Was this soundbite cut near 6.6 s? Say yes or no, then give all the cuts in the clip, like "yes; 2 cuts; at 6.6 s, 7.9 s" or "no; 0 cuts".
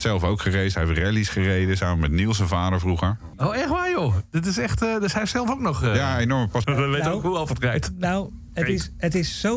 yes; 1 cut; at 6.6 s